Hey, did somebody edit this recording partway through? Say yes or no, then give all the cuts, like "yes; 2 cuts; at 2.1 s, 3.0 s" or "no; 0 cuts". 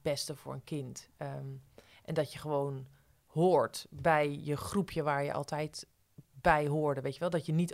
no; 0 cuts